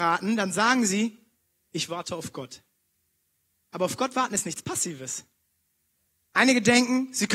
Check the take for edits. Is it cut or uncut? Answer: uncut